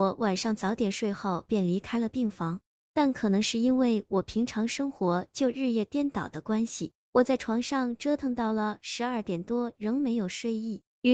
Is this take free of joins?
yes; 0 cuts

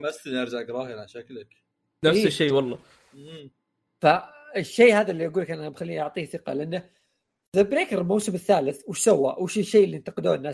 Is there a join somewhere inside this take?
no; 0 cuts

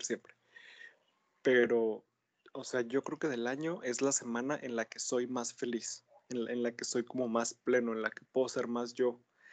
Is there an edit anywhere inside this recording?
no; 0 cuts

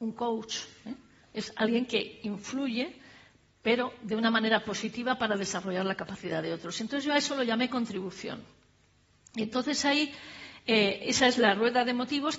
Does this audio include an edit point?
no; 0 cuts

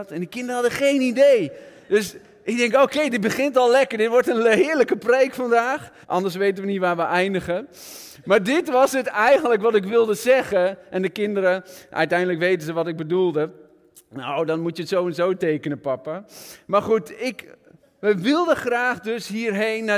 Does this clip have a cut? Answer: yes; 1 cut; at 6.0 s

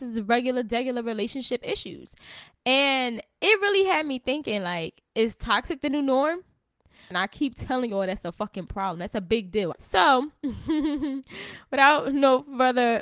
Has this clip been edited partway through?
yes; 2 cuts; at 7.1 s, 9.7 s

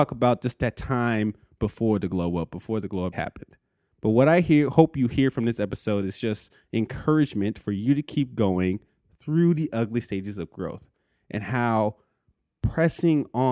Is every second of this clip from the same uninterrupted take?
no; 1 cut; at 3.1 s

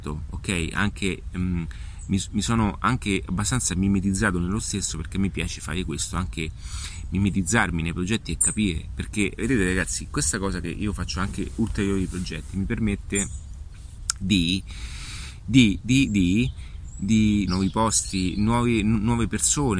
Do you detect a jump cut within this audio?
yes; 1 cut; at 17.5 s

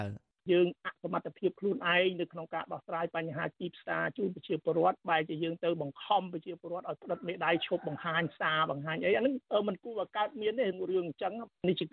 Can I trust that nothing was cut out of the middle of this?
yes; 0 cuts

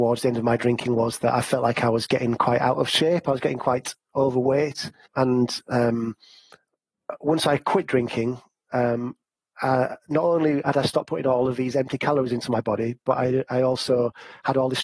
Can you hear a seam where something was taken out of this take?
yes; 1 cut; at 5.1 s

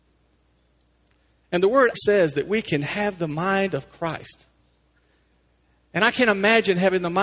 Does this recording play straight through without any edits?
no; 1 cut; at 1.9 s

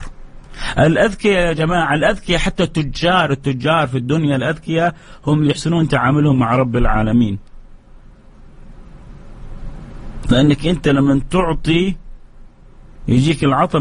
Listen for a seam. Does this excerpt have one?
no; 0 cuts

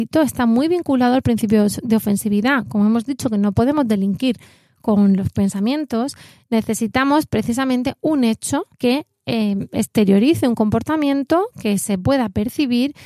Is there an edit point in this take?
yes; 1 cut; at 8.7 s

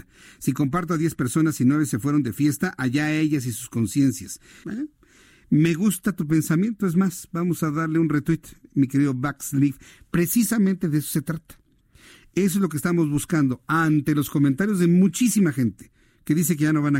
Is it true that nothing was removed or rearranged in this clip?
no; 1 cut; at 4.6 s

